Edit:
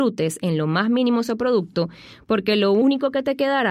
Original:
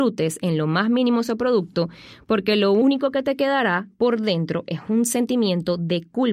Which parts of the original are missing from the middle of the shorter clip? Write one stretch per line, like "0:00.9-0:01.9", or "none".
none